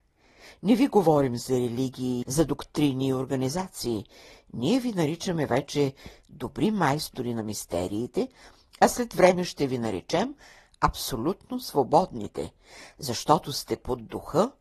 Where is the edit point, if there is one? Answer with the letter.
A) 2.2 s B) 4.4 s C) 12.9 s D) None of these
A